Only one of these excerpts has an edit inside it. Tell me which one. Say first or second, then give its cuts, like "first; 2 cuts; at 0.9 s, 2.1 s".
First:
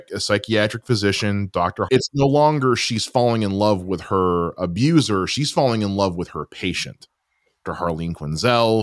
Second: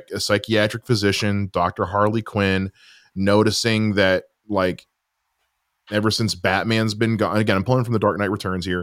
first; 2 cuts; at 1.9 s, 7.6 s